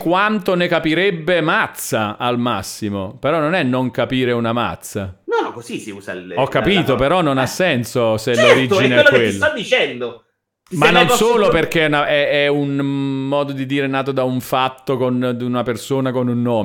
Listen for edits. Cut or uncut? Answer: uncut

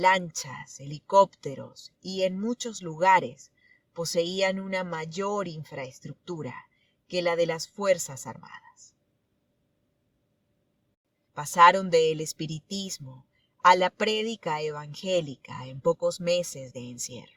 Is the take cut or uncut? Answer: cut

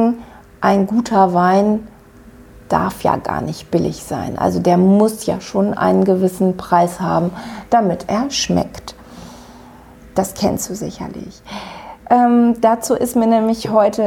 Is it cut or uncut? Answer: uncut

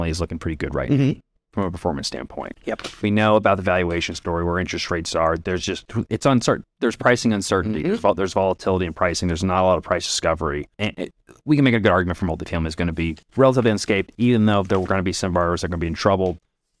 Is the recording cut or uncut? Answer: cut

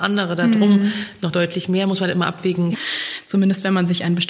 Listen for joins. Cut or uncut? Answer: cut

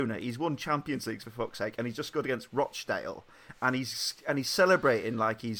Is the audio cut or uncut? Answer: uncut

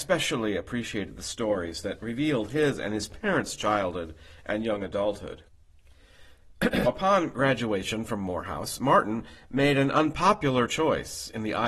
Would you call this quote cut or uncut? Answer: cut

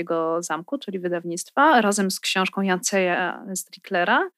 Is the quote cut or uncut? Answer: uncut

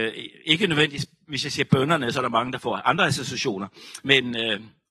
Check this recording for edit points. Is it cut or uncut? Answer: uncut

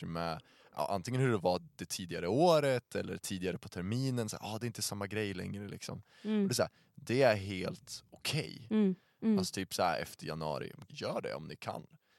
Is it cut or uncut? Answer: cut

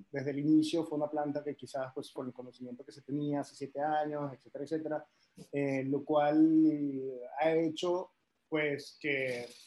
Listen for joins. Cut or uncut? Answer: cut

